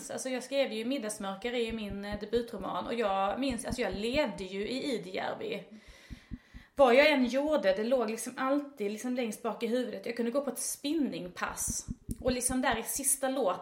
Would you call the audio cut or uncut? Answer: uncut